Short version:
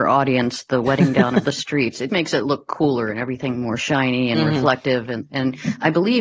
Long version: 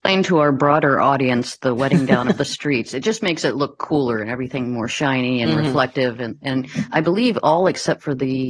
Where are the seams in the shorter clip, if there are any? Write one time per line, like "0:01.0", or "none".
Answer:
0:02.1